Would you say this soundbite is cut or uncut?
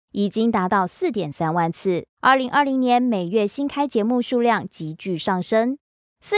cut